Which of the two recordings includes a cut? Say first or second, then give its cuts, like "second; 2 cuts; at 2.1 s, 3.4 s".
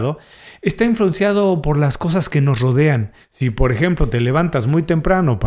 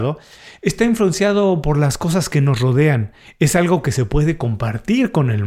first; 1 cut; at 3.2 s